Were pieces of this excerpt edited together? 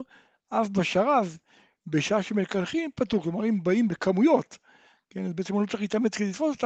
no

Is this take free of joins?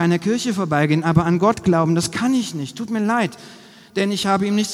yes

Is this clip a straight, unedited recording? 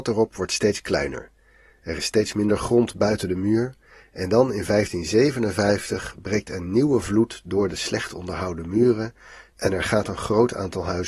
yes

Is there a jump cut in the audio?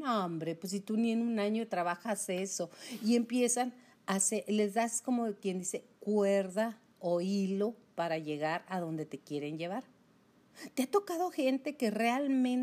no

